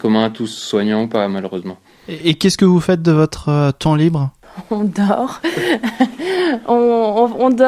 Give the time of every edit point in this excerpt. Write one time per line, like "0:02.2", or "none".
none